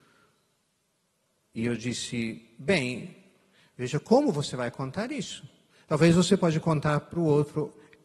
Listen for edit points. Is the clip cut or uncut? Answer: uncut